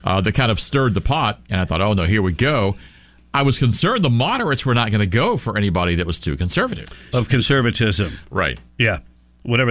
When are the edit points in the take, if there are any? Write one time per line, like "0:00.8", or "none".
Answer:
0:07.1